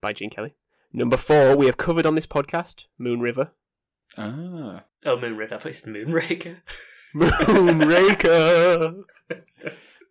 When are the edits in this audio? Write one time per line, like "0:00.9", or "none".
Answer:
none